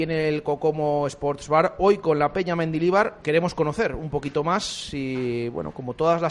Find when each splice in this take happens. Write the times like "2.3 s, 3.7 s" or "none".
3.2 s